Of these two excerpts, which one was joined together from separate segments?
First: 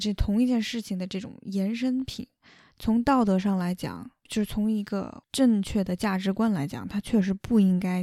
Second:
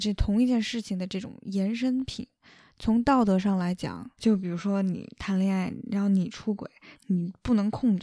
second; 2 cuts; at 4.2 s, 6.9 s

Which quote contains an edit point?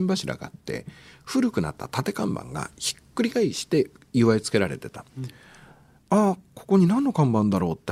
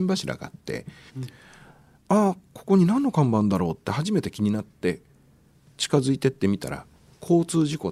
second; 1 cut; at 1.1 s

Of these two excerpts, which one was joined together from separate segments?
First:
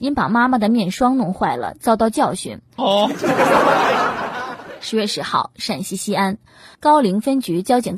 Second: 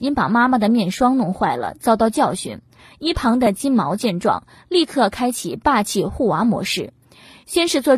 first; 1 cut; at 2.8 s

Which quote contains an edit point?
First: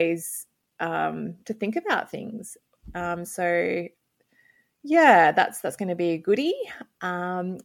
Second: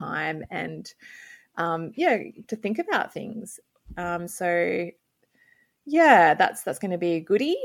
second; 1 cut; at 2.4 s

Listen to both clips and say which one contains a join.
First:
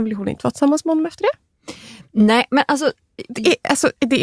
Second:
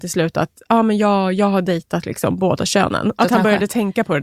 second; 1 cut; at 3.2 s

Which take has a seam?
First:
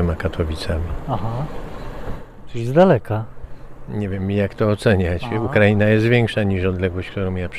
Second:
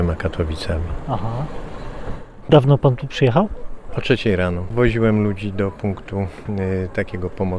second; 1 cut; at 2.4 s

